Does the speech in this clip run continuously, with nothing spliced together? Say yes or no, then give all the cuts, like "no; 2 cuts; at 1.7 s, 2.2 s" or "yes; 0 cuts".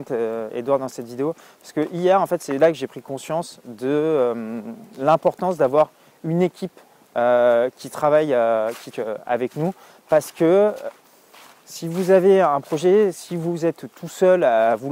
no; 1 cut; at 8.9 s